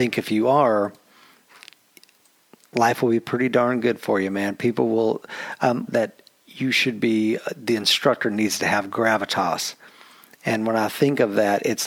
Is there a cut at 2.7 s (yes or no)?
no